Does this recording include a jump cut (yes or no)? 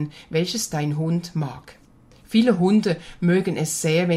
yes